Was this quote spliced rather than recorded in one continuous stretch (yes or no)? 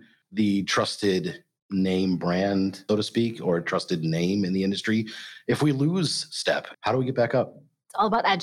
yes